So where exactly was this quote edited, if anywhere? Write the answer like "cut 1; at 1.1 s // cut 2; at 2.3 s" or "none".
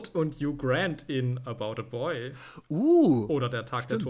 none